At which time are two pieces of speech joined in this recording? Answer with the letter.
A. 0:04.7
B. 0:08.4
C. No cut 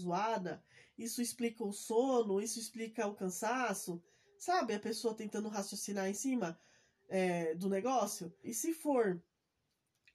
B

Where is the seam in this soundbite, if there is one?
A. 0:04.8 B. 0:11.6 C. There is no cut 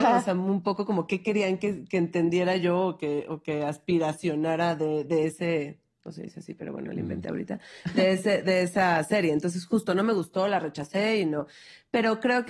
C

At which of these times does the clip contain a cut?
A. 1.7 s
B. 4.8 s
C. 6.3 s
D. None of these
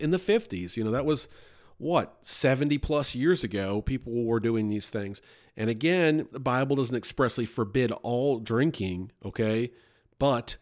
C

